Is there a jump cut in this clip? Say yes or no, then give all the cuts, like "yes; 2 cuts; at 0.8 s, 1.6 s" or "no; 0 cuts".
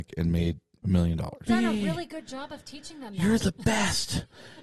yes; 1 cut; at 1.5 s